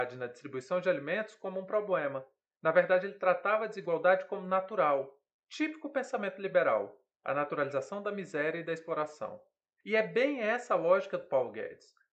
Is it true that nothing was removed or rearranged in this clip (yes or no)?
yes